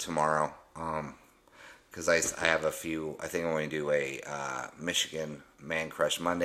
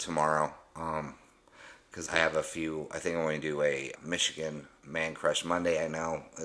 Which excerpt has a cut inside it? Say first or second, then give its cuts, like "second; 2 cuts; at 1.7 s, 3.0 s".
second; 2 cuts; at 2.1 s, 4.0 s